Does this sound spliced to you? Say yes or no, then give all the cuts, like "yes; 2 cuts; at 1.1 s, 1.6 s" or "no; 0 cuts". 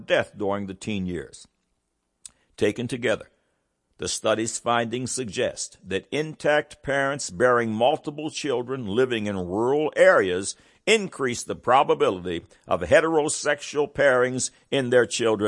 no; 0 cuts